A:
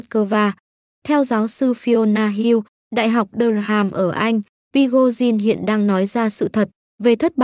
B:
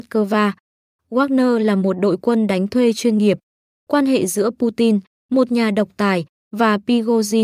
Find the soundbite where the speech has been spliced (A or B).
B